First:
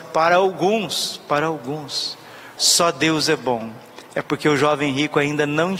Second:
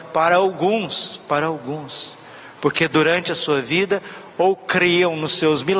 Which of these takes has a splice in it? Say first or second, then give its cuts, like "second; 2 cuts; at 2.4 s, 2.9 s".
first; 1 cut; at 2.6 s